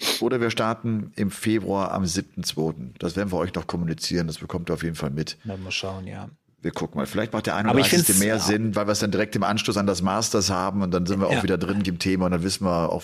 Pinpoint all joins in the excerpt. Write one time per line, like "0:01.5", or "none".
0:11.8